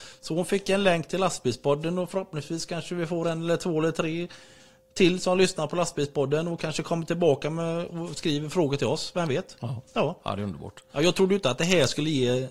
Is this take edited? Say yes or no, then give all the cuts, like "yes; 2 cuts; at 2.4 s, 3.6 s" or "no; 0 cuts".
no; 0 cuts